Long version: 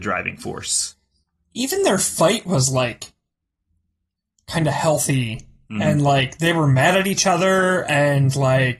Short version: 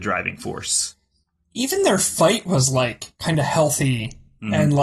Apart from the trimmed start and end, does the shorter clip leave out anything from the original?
yes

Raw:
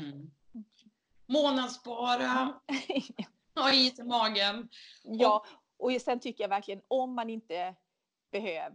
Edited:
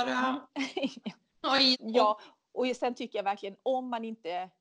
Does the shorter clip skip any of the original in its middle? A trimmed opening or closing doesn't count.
yes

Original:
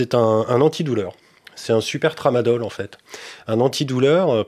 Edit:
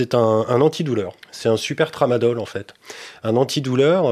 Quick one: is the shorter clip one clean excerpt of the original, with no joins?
no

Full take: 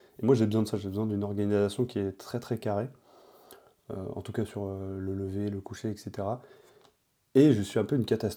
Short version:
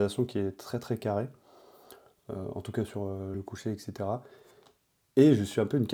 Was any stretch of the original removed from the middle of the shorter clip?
yes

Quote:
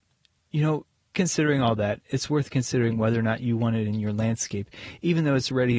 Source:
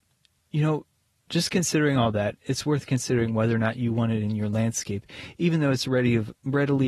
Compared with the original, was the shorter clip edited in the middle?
yes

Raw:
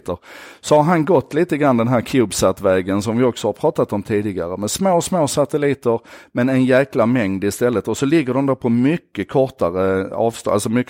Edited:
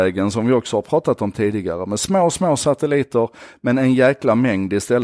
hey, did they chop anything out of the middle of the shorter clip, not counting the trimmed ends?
no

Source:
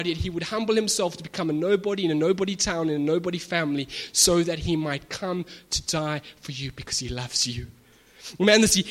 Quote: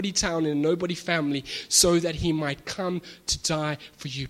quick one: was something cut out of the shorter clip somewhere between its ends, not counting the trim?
no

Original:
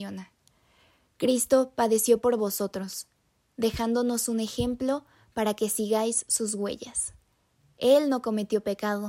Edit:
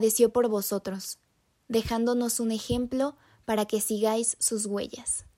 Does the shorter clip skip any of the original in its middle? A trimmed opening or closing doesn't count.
no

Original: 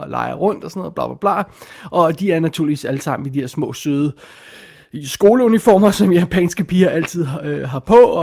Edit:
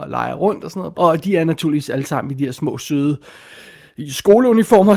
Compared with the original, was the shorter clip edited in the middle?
yes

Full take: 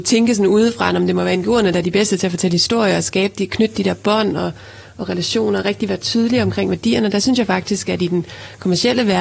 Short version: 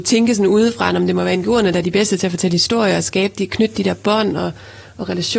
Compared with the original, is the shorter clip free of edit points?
yes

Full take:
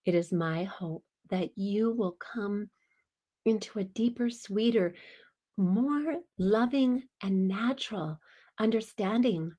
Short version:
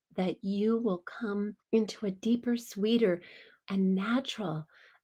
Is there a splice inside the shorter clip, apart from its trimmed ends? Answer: yes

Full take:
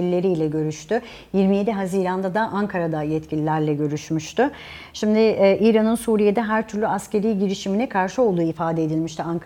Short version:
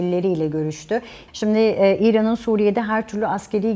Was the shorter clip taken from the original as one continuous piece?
no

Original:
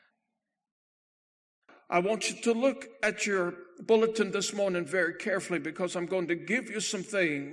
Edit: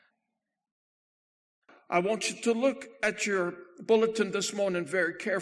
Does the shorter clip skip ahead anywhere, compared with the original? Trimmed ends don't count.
no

